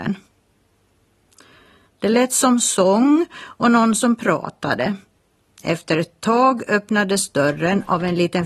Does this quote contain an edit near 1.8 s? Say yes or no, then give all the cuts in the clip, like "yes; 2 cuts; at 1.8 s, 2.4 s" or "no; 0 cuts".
yes; 1 cut; at 1.8 s